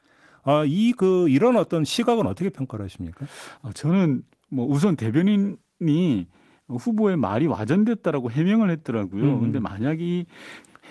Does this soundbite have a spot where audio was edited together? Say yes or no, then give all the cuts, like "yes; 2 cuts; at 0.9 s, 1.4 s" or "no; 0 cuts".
no; 0 cuts